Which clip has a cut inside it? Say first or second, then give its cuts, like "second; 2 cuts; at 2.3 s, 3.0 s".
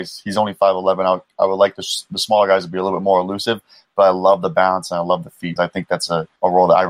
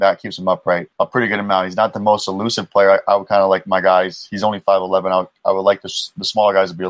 first; 1 cut; at 5.6 s